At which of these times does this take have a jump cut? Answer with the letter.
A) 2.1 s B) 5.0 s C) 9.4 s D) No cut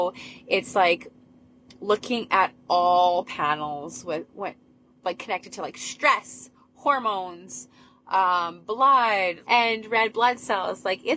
C